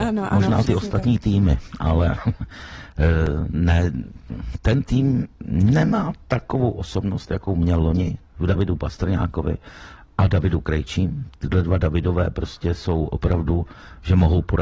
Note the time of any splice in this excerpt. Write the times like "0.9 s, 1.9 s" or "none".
none

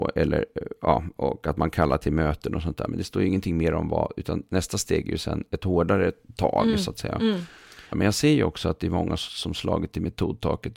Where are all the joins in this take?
2.9 s, 7.9 s, 9.2 s

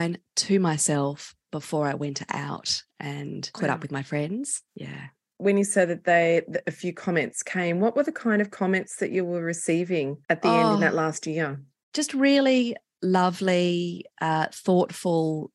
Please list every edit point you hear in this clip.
none

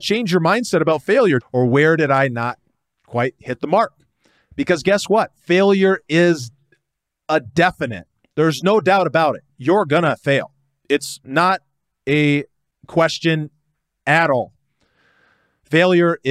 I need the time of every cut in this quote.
1.4 s, 4.5 s

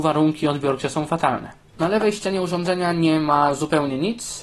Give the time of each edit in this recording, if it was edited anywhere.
1.7 s

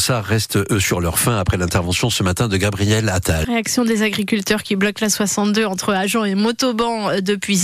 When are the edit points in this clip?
3.4 s

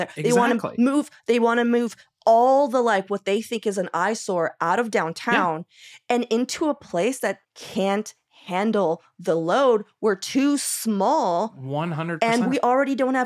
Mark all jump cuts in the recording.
7.4 s

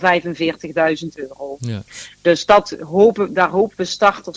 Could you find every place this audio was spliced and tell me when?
none

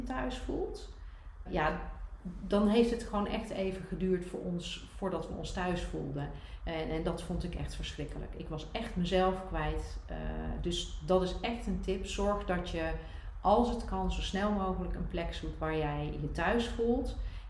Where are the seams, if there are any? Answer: 1.5 s, 6.6 s

